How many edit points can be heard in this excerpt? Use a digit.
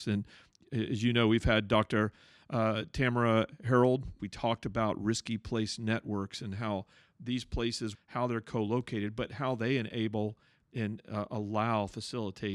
2